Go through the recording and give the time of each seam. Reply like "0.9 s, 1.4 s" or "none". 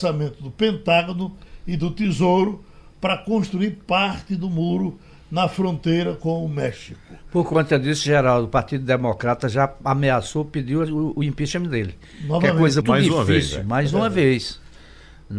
12.8 s